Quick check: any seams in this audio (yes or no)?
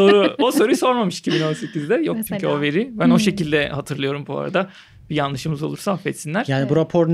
no